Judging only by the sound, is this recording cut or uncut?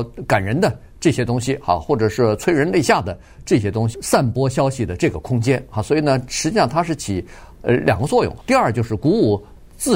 cut